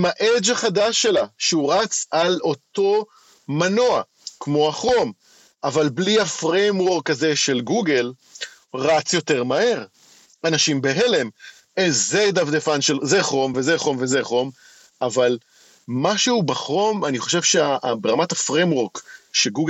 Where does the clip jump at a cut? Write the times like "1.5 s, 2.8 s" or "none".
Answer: 13.5 s